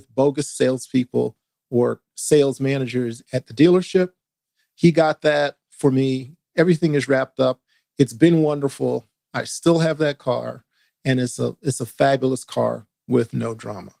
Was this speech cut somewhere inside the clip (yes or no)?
no